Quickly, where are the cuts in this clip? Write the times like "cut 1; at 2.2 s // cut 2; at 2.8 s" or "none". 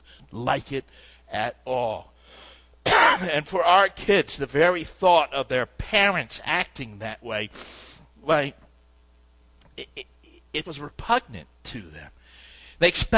cut 1; at 10.6 s